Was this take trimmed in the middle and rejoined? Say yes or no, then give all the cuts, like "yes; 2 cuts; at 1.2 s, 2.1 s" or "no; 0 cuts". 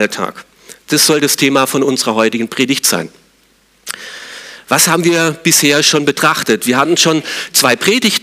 no; 0 cuts